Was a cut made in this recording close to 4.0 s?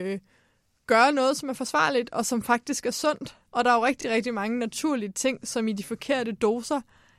no; 0 cuts

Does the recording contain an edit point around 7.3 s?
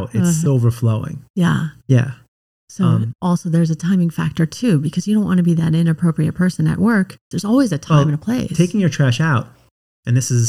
yes; 1 cut; at 7.3 s

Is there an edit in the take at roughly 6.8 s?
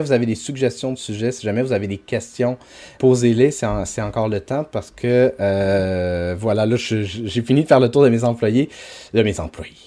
no; 1 cut; at 3.0 s

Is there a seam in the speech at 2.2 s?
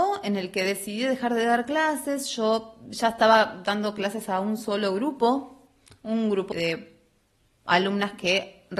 no; 1 cut; at 6.5 s

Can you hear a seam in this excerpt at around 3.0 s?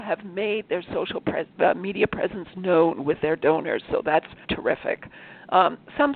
no; 1 cut; at 4.4 s

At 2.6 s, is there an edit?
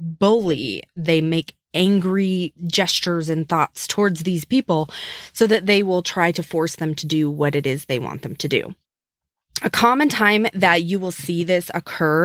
yes; 1 cut; at 2.6 s

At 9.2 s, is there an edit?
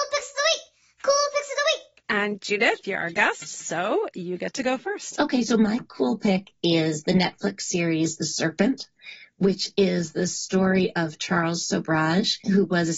no; 0 cuts

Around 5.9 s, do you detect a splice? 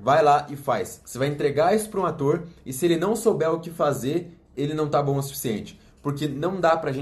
no; 1 cut; at 1.0 s

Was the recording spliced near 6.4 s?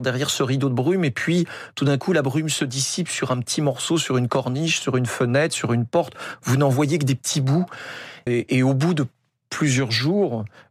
no; 1 cut; at 8.3 s

